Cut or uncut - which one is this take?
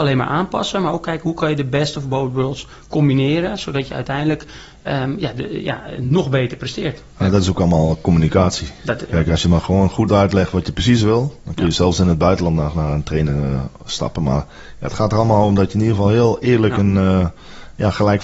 uncut